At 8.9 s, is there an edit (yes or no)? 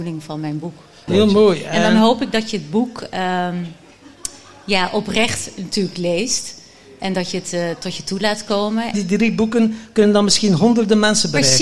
yes